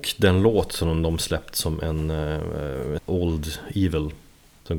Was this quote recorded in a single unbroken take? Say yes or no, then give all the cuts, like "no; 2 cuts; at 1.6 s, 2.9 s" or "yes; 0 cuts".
no; 1 cut; at 3.0 s